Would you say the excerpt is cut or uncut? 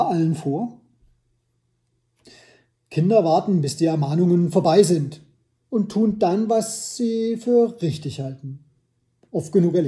uncut